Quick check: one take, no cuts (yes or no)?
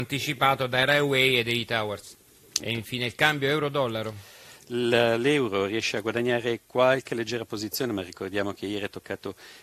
no